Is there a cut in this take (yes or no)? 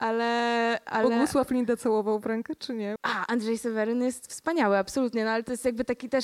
yes